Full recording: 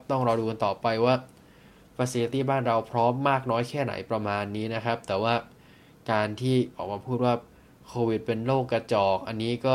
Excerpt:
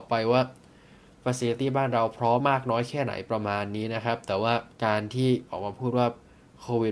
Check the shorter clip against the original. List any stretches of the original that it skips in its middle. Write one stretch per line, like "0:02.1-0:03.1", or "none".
0:03.1-0:03.2
0:05.5-0:06.0